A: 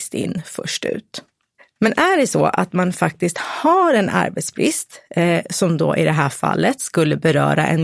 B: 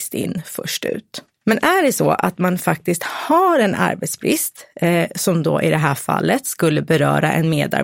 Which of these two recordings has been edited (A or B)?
B